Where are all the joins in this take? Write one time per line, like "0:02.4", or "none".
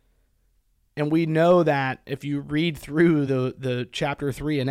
none